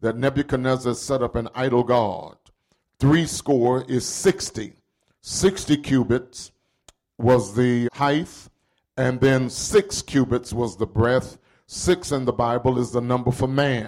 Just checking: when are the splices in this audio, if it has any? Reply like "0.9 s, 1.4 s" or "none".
7.8 s